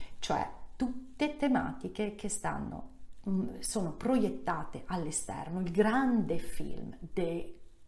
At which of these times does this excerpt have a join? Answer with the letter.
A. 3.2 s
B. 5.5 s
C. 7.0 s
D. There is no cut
D